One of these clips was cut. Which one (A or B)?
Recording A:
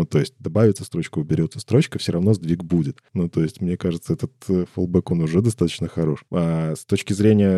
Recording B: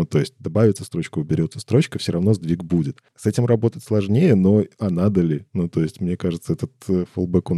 A